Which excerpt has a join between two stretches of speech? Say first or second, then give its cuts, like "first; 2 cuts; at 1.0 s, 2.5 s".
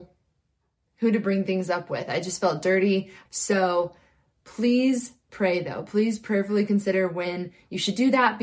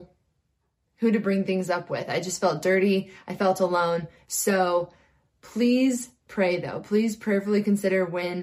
first; 1 cut; at 3.3 s